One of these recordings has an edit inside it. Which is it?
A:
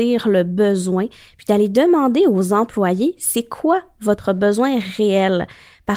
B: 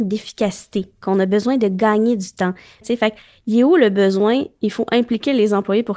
B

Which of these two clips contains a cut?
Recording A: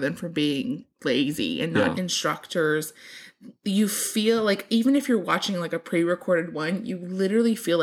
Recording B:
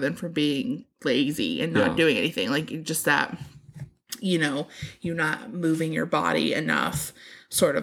A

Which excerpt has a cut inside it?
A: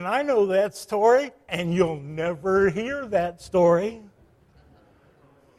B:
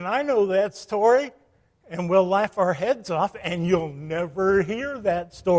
A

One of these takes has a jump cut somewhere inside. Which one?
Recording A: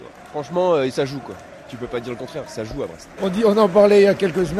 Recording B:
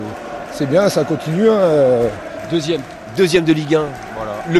A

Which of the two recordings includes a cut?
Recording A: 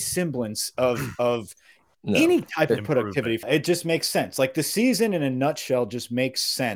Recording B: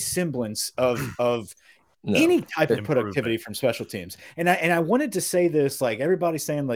A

